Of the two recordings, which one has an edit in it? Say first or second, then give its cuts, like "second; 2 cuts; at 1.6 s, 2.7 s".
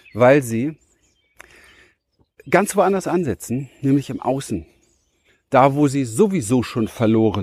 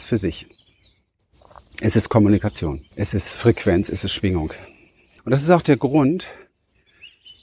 second; 2 cuts; at 2.9 s, 5.2 s